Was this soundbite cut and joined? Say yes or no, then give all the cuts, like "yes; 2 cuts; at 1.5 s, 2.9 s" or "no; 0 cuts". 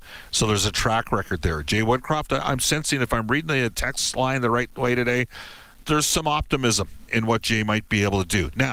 yes; 2 cuts; at 5.8 s, 7.1 s